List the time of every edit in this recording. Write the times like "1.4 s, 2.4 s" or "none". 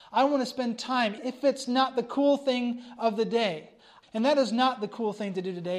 1.2 s, 4.0 s